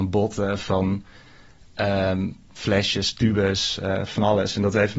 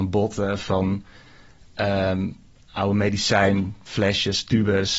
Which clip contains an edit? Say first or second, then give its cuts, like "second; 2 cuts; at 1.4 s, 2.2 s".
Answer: first; 1 cut; at 2.5 s